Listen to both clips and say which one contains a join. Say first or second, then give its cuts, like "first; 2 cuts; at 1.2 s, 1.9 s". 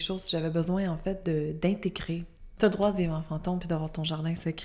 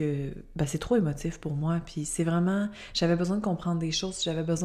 first; 1 cut; at 2.6 s